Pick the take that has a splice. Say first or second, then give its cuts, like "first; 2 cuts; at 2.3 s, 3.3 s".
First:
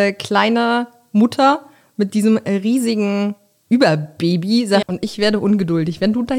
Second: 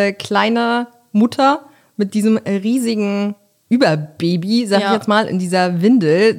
first; 1 cut; at 4.8 s